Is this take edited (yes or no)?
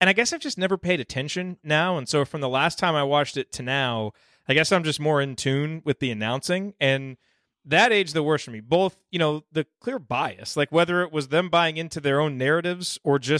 no